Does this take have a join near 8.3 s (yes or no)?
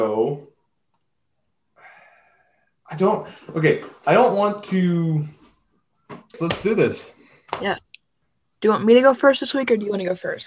no